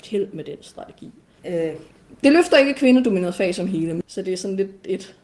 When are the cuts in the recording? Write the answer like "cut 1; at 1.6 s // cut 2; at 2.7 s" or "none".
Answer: cut 1; at 1.4 s // cut 2; at 4.0 s